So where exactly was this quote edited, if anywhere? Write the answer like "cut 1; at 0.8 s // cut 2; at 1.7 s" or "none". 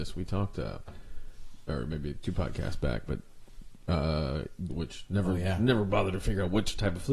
cut 1; at 4.7 s